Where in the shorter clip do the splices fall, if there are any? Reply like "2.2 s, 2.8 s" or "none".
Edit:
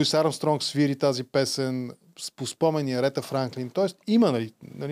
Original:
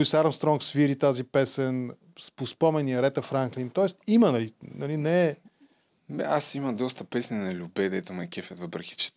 none

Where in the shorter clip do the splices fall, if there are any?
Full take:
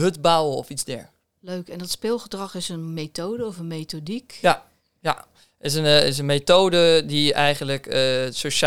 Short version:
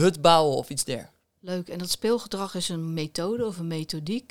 none

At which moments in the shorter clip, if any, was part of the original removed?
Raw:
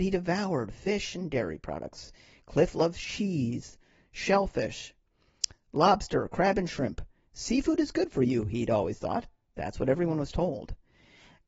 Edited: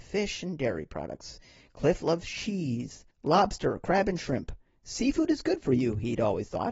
3.1 s

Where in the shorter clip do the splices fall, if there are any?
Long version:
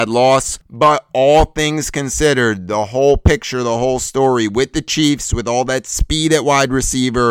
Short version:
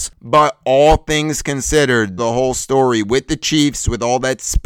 2.2 s

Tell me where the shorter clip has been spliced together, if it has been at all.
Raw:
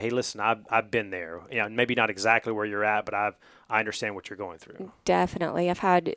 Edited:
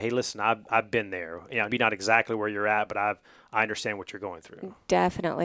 1.7 s

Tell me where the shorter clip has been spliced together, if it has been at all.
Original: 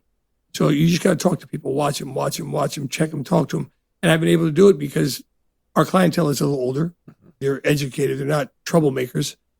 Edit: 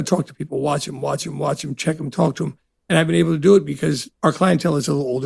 4.2 s

